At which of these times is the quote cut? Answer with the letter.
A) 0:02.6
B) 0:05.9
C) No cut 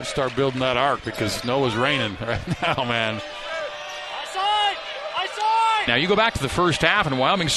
B